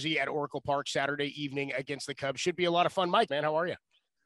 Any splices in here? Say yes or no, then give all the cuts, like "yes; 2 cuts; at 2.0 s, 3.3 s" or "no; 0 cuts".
yes; 1 cut; at 3.3 s